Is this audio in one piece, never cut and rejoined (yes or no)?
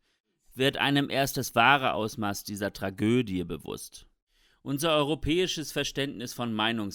yes